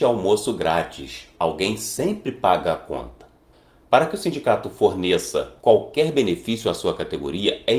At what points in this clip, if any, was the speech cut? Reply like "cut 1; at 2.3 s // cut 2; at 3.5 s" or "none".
cut 1; at 1.4 s // cut 2; at 5.6 s